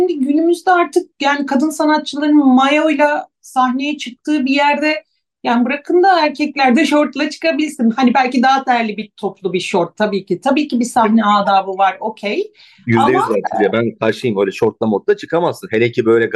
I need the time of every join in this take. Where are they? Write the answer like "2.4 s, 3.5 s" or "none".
none